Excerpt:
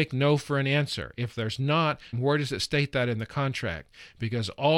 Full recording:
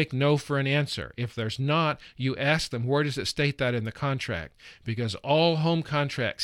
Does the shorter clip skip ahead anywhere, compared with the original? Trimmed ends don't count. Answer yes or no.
yes